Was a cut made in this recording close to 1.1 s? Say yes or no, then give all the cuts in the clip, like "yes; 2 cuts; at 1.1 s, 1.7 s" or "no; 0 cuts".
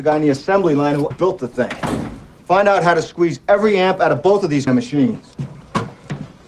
yes; 1 cut; at 1.1 s